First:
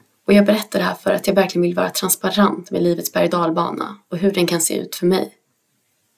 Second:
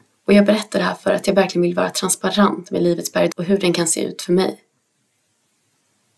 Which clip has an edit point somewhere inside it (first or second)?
second